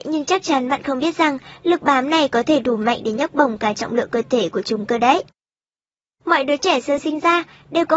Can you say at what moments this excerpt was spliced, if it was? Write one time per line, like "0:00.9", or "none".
0:07.0